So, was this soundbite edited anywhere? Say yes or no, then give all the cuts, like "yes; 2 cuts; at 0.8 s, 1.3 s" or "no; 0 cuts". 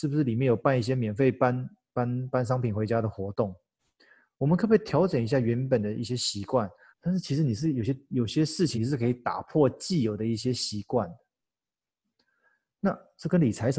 yes; 2 cuts; at 6.9 s, 8.7 s